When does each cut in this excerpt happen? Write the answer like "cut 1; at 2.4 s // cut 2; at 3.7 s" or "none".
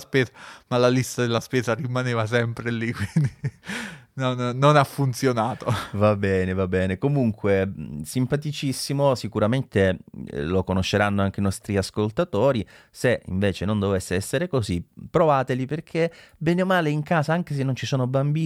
none